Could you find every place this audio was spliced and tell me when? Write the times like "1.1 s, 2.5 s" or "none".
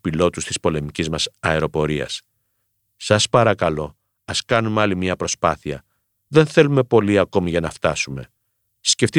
none